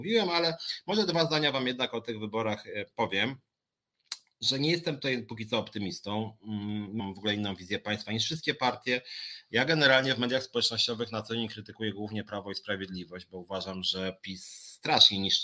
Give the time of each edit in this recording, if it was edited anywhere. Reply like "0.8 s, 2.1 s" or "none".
7.0 s